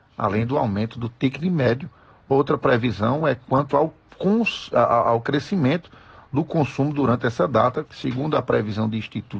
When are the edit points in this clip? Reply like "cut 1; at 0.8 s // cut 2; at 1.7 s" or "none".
cut 1; at 7.9 s

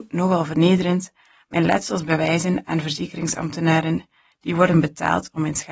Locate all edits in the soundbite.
none

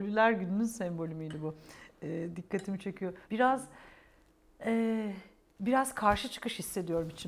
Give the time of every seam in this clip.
cut 1; at 3.2 s

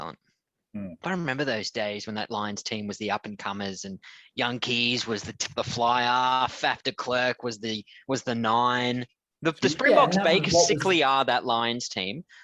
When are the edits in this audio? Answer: cut 1; at 1.0 s // cut 2; at 9.3 s

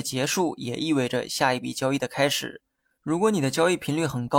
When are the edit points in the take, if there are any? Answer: none

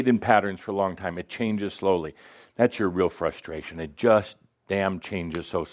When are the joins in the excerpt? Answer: none

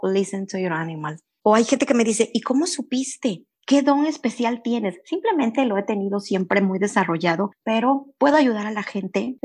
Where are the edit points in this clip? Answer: cut 1; at 1.4 s

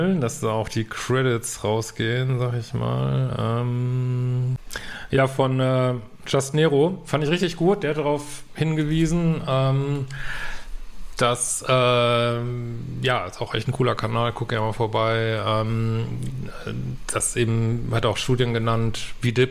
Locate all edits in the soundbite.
none

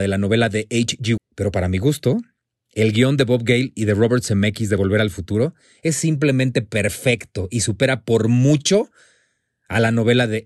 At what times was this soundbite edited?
cut 1; at 1.2 s

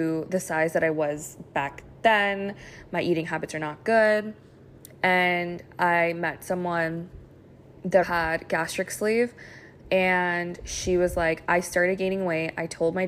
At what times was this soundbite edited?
cut 1; at 8.0 s

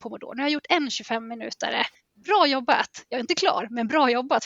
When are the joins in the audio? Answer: none

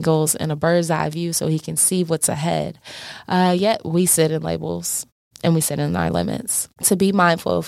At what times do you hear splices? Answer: cut 1; at 6.7 s

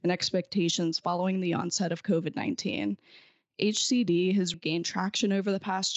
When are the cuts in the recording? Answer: cut 1; at 4.5 s

